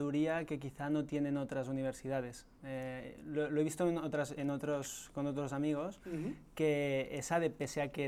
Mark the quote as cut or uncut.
uncut